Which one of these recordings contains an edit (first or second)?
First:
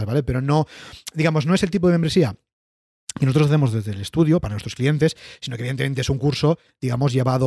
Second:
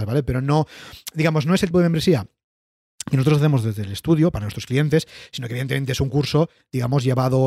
second